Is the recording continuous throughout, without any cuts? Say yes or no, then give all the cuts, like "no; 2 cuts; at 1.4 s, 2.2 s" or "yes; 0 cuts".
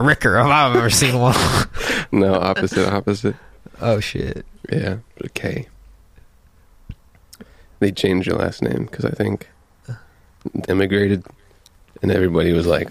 no; 1 cut; at 10.6 s